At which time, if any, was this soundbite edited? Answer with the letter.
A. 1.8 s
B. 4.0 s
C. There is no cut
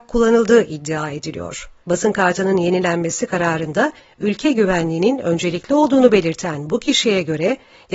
A